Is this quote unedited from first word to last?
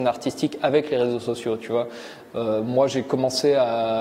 yes; 0 cuts

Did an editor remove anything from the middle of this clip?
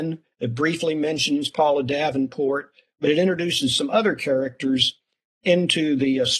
no; 0 cuts

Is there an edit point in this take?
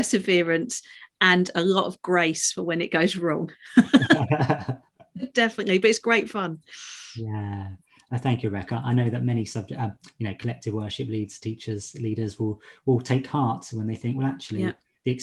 no; 0 cuts

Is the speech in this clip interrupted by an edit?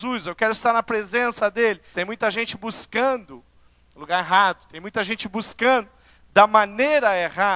yes; 1 cut; at 1.9 s

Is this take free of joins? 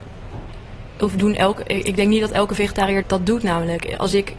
no; 1 cut; at 3.0 s

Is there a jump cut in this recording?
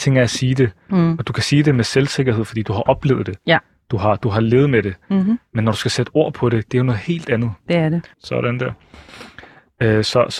yes; 1 cut; at 8.1 s

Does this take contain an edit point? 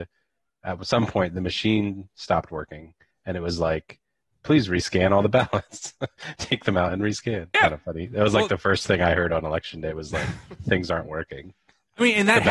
yes; 1 cut; at 7.5 s

